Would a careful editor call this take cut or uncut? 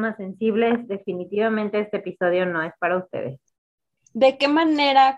cut